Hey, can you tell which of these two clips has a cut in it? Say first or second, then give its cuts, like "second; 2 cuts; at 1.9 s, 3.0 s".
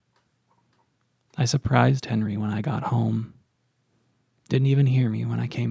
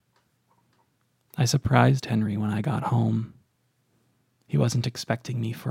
first; 1 cut; at 4.3 s